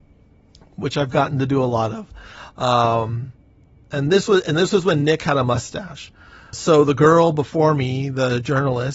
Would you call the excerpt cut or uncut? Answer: cut